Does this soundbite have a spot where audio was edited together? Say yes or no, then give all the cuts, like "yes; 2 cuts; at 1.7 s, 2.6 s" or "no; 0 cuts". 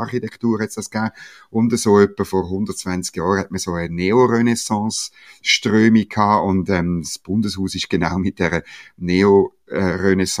no; 0 cuts